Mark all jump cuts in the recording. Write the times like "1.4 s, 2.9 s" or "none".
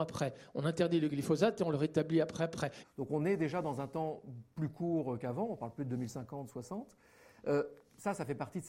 2.8 s